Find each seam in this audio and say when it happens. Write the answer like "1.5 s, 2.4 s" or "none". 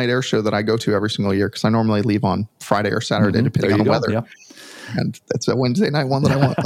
none